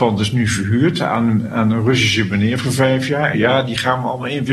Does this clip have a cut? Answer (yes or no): yes